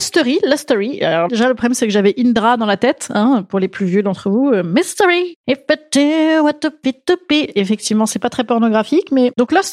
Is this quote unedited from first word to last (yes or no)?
no